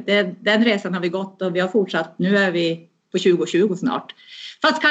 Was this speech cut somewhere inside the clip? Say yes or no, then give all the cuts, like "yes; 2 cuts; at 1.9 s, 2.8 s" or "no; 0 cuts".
no; 0 cuts